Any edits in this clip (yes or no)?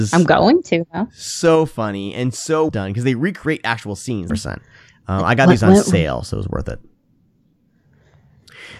yes